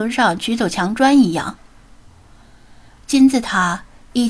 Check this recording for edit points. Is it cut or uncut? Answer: uncut